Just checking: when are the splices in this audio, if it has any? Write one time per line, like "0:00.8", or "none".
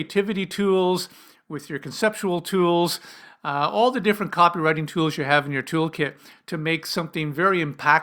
none